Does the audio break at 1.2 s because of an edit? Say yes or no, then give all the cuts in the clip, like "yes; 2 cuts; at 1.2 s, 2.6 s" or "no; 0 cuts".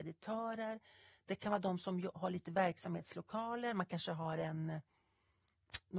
no; 0 cuts